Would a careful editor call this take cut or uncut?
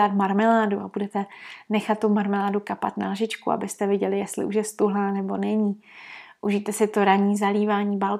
uncut